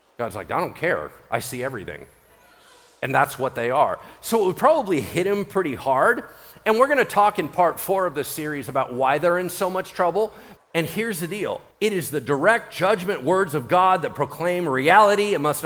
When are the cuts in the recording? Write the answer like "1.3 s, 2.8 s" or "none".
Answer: 10.6 s, 11.7 s